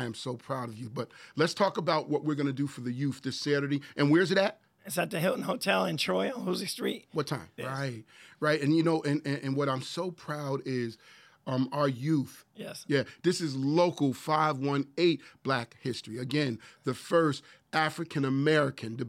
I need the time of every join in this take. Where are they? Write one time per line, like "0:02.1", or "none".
0:07.6
0:12.5